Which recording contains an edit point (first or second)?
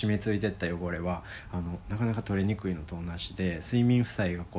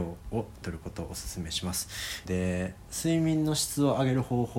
second